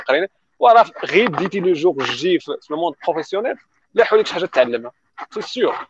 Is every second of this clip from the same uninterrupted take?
yes; 0 cuts

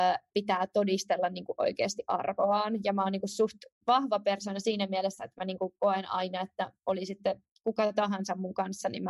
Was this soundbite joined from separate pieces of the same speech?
no; 0 cuts

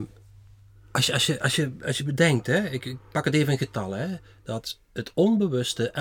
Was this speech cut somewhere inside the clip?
no; 0 cuts

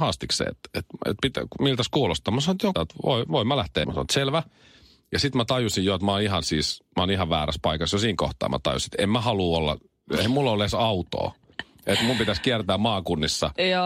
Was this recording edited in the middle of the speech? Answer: yes; 2 cuts; at 2.7 s, 3.8 s

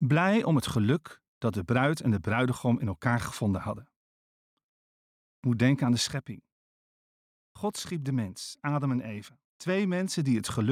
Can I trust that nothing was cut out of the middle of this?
yes; 0 cuts

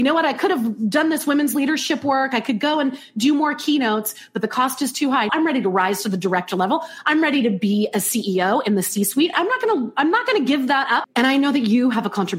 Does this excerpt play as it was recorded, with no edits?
no; 3 cuts; at 5.3 s, 9.3 s, 11.0 s

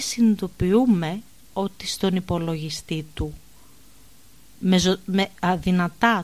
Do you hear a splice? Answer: no; 0 cuts

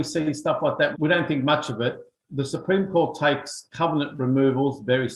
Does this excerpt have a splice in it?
yes; 1 cut; at 0.9 s

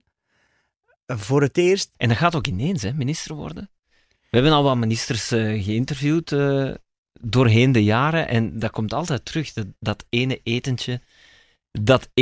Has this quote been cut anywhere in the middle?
yes; 1 cut; at 1.9 s

